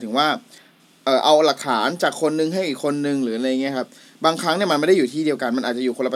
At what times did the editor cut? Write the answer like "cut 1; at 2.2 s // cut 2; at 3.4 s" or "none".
none

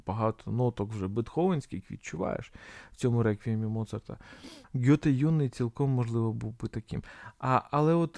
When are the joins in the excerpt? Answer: cut 1; at 4.6 s

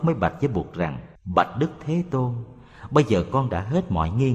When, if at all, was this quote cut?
cut 1; at 1.2 s

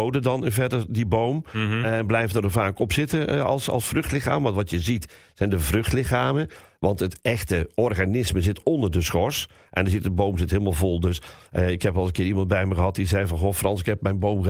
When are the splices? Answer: none

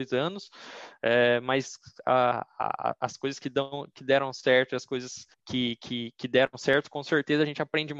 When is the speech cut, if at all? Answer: cut 1; at 5.3 s

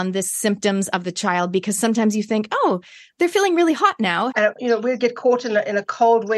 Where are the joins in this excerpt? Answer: cut 1; at 4.3 s

